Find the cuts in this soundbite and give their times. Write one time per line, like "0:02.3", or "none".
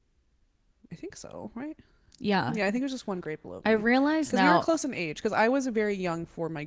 none